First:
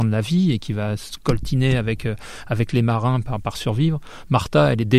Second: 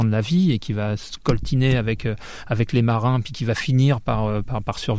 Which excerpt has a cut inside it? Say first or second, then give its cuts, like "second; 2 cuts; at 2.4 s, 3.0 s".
first; 1 cut; at 3.2 s